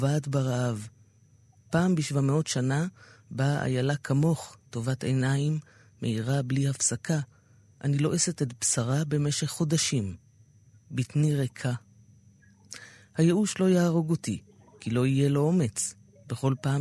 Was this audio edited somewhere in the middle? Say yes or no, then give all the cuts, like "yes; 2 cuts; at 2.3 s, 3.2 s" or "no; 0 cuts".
no; 0 cuts